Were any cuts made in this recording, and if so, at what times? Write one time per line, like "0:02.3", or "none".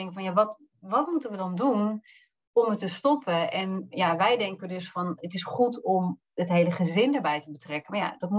none